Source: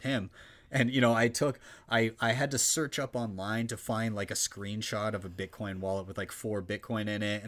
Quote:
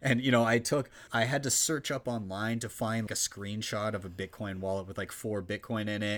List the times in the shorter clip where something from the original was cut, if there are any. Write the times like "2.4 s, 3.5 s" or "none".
1.1 s, 3.1 s